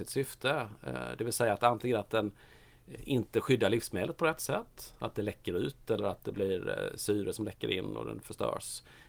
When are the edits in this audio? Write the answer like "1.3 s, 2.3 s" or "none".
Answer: none